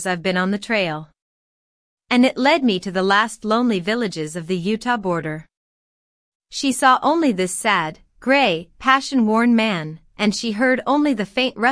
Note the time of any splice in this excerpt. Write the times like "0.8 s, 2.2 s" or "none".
6.3 s